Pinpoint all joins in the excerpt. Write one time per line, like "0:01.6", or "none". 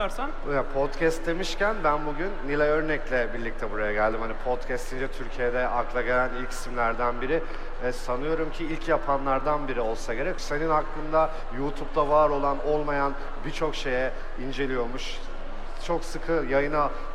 0:10.4